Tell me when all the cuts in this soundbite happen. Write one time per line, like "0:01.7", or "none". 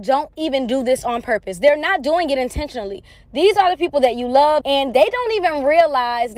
0:04.6